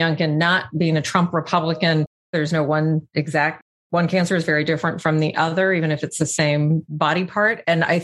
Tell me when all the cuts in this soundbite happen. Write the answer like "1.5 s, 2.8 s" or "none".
2.3 s